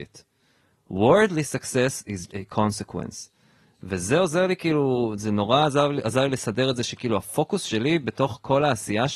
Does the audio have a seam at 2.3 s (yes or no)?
yes